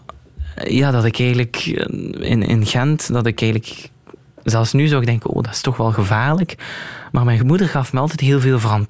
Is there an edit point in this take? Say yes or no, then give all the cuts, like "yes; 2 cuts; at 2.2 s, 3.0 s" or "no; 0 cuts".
no; 0 cuts